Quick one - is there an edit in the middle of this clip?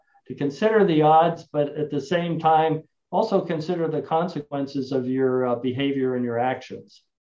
no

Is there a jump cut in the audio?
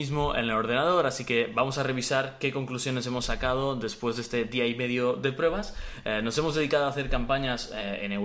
no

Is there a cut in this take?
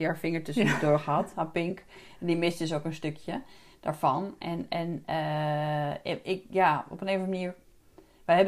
no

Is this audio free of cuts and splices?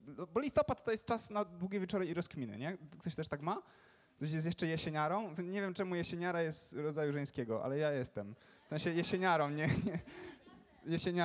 yes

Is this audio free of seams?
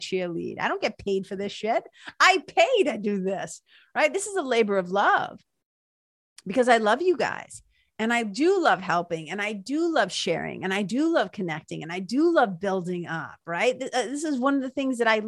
yes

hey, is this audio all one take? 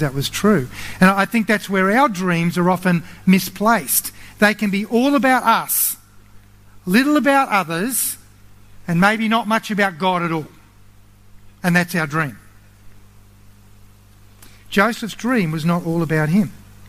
yes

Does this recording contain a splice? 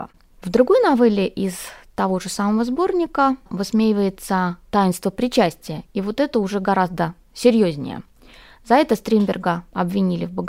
no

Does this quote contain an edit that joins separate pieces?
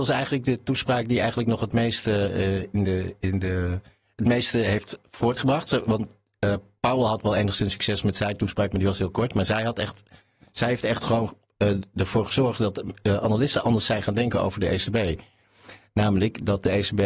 no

